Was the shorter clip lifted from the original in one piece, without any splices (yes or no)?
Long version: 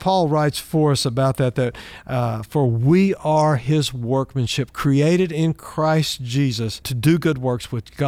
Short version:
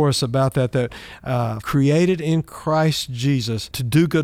no